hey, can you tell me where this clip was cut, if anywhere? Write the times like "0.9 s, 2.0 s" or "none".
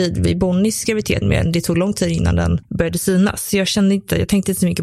1.2 s